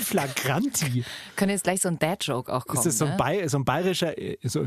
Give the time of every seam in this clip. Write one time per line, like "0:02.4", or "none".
none